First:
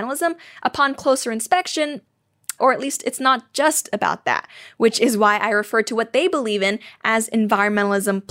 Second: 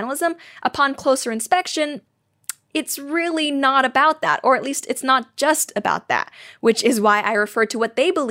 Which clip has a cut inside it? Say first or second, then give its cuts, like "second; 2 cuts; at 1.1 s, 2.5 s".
first; 1 cut; at 2.6 s